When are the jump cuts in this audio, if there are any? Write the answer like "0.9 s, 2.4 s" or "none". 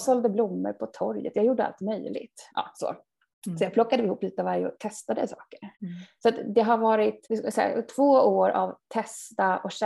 2.5 s, 5.7 s, 7.2 s